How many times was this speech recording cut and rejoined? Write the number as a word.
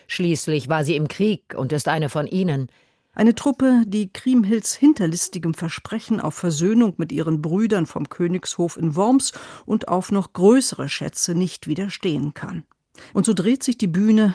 two